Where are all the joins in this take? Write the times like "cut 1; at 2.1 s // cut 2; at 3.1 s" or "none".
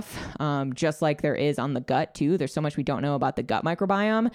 none